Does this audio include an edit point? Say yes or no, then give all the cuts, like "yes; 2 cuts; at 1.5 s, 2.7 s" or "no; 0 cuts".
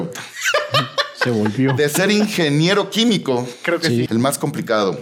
yes; 1 cut; at 4.1 s